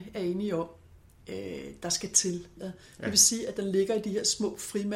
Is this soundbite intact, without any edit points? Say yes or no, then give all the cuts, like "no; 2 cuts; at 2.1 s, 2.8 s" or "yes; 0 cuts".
no; 1 cut; at 2.6 s